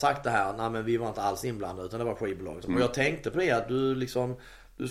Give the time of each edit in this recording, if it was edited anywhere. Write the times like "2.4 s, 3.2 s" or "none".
2.6 s